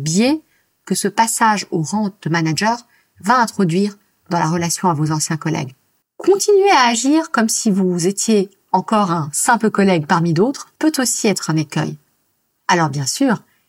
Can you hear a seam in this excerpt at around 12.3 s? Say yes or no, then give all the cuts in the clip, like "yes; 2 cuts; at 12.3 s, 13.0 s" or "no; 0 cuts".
no; 2 cuts; at 6.0 s, 10.8 s